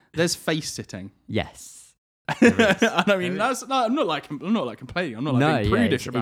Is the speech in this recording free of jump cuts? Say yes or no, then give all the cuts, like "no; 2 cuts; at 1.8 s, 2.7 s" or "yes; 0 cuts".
yes; 0 cuts